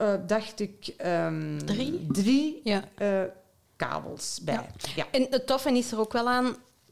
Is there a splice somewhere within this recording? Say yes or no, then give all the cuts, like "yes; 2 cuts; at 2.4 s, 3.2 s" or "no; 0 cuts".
no; 0 cuts